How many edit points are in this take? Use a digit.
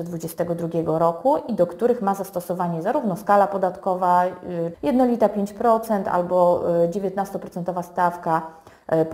1